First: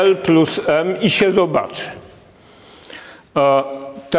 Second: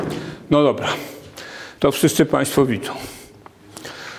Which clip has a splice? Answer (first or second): second